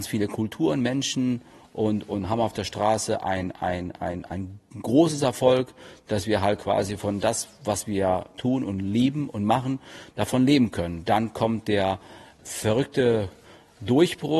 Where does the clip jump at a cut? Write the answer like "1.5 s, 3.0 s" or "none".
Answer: none

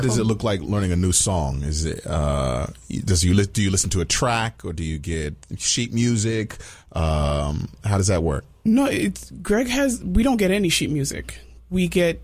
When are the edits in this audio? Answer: none

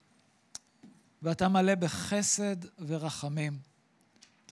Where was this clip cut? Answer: 1.0 s

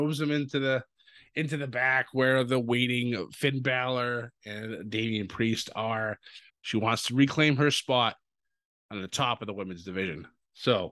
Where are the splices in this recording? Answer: 6.5 s

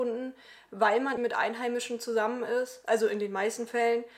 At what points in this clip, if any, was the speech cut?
1.2 s

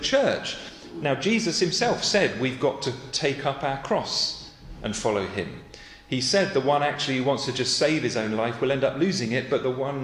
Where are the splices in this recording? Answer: none

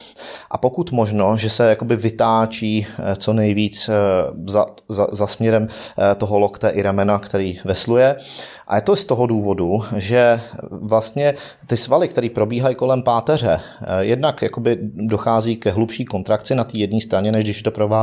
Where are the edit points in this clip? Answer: none

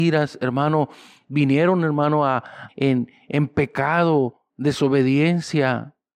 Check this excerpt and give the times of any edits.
2.7 s, 4.5 s

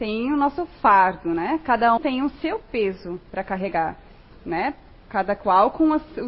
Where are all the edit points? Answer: 2.0 s, 4.3 s

